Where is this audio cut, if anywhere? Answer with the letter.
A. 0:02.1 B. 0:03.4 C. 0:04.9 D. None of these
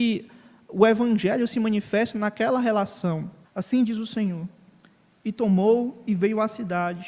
B